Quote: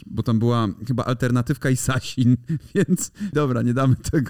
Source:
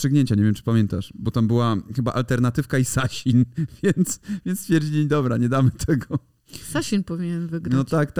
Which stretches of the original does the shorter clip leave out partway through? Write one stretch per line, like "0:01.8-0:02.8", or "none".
0:04.4-0:05.1